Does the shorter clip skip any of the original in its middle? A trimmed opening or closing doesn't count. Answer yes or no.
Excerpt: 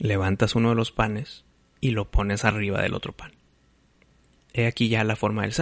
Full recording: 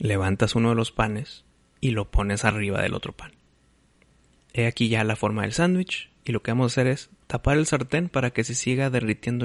no